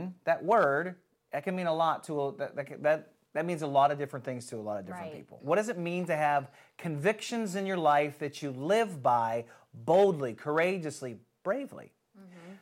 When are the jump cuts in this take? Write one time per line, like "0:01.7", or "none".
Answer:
0:05.4